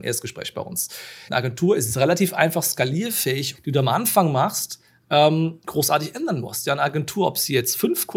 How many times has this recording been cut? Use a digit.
2